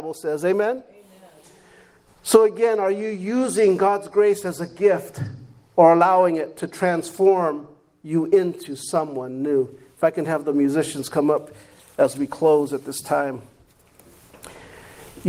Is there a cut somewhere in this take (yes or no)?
no